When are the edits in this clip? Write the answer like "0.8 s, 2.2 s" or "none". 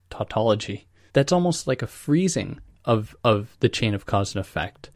1.1 s